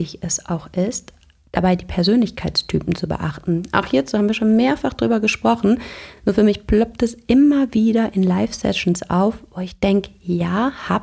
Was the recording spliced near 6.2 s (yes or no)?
no